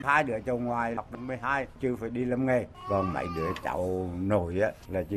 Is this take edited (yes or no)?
no